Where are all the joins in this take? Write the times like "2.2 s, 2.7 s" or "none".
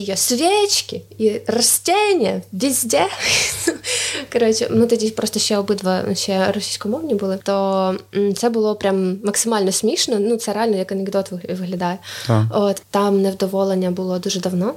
12.8 s